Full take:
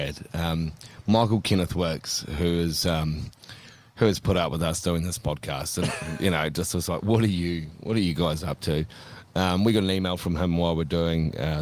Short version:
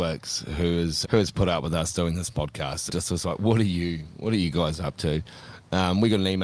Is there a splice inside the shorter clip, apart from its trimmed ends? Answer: yes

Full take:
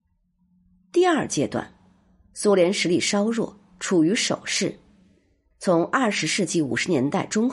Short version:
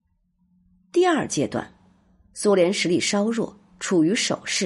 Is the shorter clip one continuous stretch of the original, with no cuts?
yes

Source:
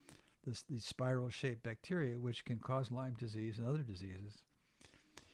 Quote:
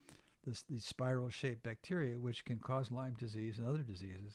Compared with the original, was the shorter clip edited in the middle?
no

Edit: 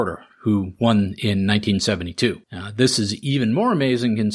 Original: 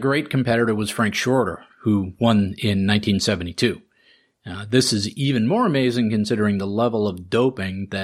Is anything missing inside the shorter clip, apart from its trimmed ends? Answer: yes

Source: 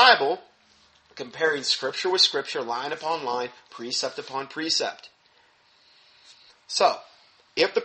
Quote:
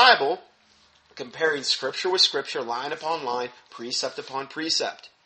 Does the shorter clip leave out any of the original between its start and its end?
no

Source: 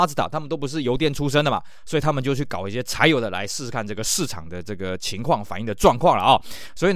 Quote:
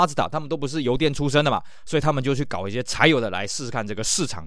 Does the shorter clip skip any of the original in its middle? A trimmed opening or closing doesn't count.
no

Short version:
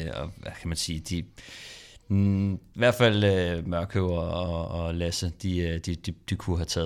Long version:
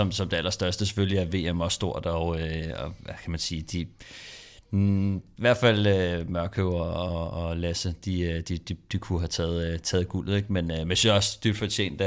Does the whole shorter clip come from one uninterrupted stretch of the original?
yes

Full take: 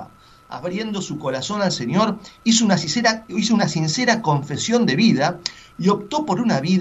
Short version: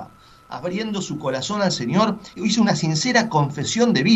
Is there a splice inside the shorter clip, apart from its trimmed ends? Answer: yes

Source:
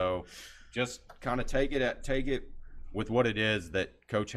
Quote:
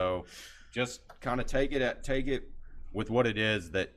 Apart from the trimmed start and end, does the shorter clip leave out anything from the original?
no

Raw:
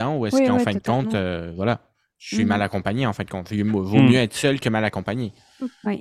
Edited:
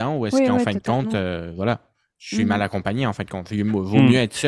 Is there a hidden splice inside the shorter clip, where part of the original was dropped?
no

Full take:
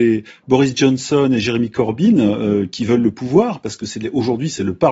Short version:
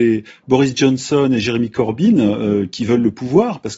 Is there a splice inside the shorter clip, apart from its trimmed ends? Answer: no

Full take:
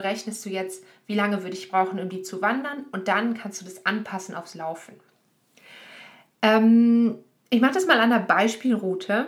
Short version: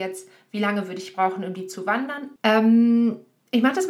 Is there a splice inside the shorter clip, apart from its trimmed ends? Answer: yes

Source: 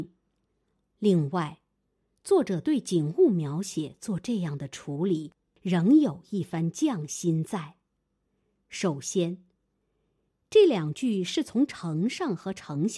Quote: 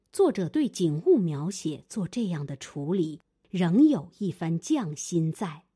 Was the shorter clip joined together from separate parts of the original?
no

